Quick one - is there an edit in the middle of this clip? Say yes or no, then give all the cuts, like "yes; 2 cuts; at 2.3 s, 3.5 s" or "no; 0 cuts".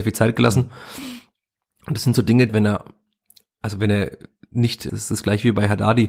yes; 2 cuts; at 2.5 s, 4.9 s